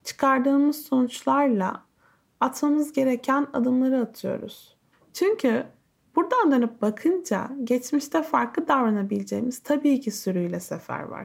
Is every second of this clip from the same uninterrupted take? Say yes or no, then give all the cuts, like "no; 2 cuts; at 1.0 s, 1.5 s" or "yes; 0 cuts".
no; 1 cut; at 4.9 s